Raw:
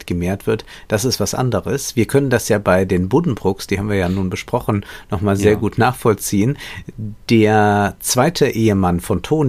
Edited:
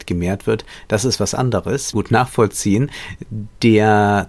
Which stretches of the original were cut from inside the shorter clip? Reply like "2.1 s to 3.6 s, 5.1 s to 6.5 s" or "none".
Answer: 1.9 s to 5.6 s